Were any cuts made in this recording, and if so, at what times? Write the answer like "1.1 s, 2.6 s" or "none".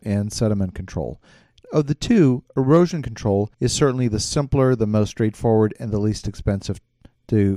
3.5 s